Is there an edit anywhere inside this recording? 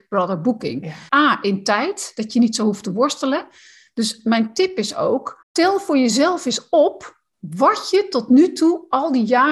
yes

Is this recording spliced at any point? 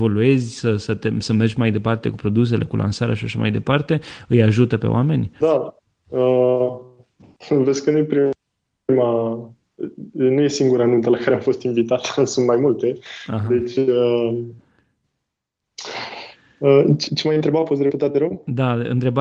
yes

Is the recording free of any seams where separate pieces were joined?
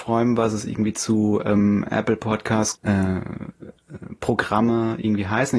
no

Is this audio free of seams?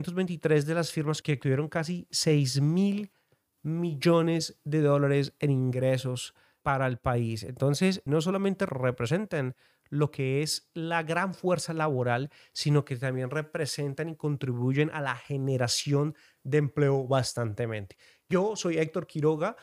yes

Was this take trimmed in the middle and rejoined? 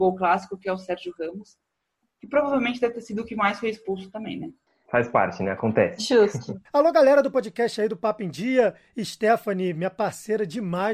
yes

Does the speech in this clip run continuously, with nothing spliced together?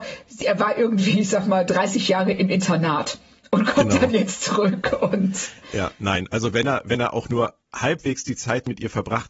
yes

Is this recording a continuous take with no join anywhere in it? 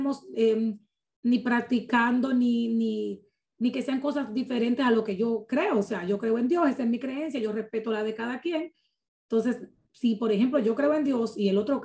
yes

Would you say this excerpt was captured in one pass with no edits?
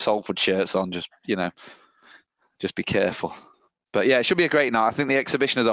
yes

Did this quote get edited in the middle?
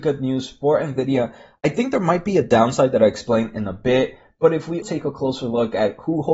yes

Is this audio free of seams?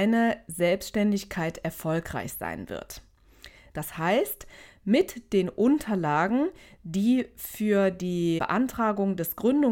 no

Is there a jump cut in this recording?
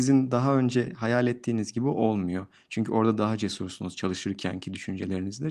no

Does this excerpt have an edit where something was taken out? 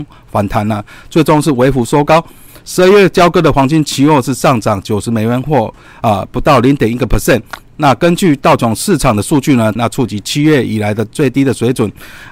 yes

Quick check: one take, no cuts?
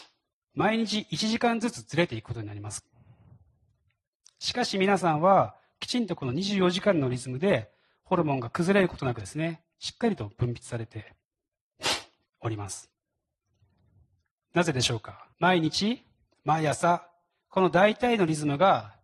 no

